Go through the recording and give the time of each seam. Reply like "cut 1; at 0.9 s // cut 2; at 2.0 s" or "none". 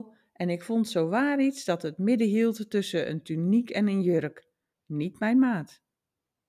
cut 1; at 4.7 s